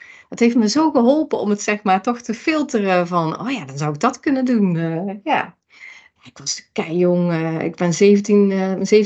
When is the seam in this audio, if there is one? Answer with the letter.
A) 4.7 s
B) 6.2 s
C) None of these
B